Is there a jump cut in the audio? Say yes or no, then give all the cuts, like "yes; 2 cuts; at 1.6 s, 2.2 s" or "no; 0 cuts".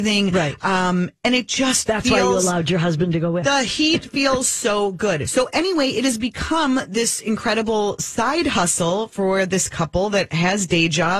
no; 0 cuts